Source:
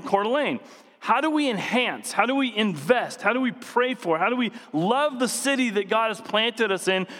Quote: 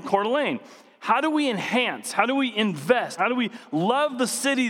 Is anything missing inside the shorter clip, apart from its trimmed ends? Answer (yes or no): yes